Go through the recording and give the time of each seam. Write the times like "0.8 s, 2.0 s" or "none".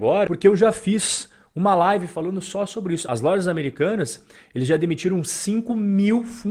3.1 s